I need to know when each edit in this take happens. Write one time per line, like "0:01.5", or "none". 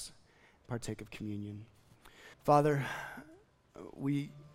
0:02.3